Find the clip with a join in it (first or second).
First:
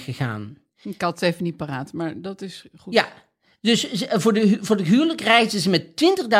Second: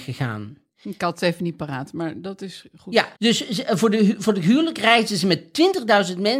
second